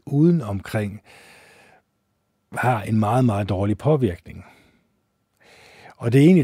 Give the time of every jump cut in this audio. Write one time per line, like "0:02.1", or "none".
none

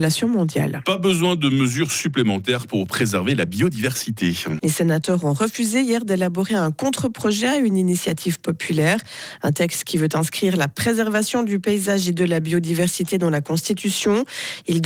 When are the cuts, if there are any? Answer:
0:04.6

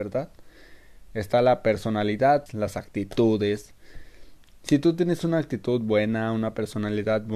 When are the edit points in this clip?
0:02.5

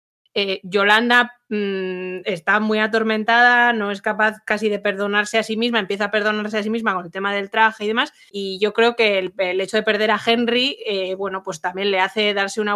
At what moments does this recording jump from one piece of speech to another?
0:08.3

